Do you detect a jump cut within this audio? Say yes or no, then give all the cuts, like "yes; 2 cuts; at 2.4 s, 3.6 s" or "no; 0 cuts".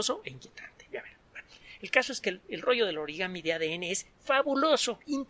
yes; 1 cut; at 4.1 s